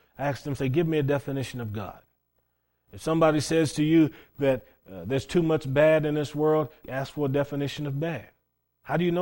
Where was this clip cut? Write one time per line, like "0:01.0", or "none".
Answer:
0:04.8
0:06.8